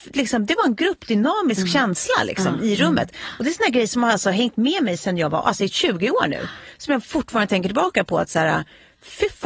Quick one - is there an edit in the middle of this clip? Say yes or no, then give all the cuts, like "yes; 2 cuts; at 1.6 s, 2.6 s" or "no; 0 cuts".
no; 0 cuts